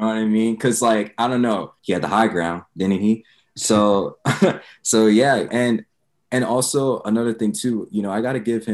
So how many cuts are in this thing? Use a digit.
2